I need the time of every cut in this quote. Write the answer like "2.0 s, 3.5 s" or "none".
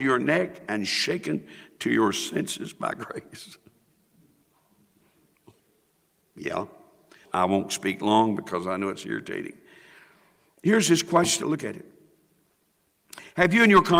7.2 s, 11.4 s